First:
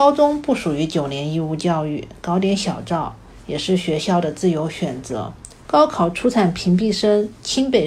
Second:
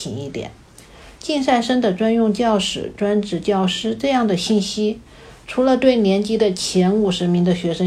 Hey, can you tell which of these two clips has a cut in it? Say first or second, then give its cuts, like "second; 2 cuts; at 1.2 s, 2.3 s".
first; 1 cut; at 5.7 s